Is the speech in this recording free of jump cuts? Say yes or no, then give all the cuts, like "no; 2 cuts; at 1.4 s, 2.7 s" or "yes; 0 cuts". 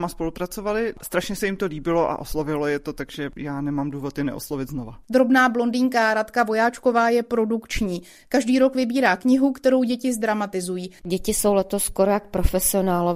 no; 1 cut; at 11.0 s